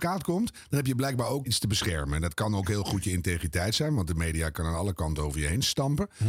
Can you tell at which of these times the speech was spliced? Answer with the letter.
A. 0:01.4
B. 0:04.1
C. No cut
A